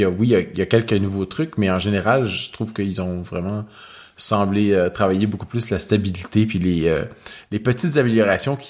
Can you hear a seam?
no; 0 cuts

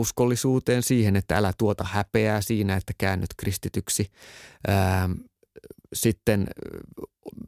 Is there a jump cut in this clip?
no; 0 cuts

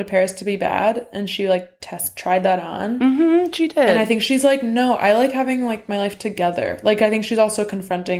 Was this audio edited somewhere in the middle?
no; 0 cuts

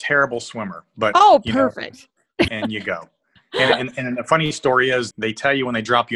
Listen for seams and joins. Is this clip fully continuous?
no; 2 cuts; at 2.5 s, 5.1 s

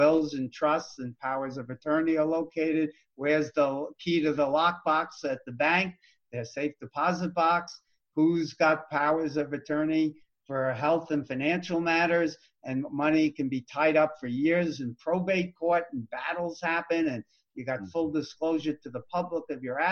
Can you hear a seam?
no; 0 cuts

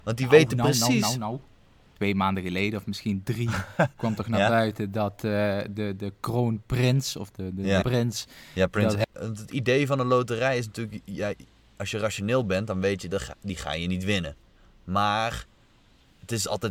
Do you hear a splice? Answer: yes; 2 cuts; at 7.8 s, 9.0 s

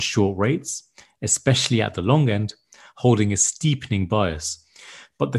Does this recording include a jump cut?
no; 0 cuts

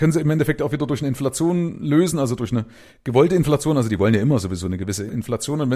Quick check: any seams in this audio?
no; 0 cuts

